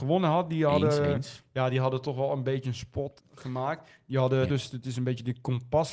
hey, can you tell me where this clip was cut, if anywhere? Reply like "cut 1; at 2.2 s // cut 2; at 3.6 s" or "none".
cut 1; at 3.2 s // cut 2; at 4.5 s